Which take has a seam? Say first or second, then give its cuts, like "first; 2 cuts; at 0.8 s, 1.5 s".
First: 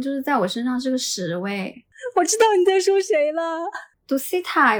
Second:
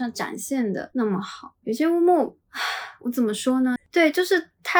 second; 1 cut; at 3.8 s